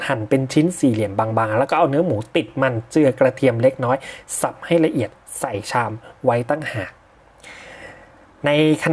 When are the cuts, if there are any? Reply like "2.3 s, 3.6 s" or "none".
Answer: none